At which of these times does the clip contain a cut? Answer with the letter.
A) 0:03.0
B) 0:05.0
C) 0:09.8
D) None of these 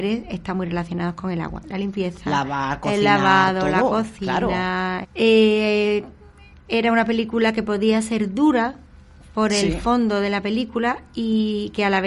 B